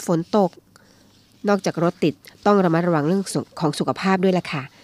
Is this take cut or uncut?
uncut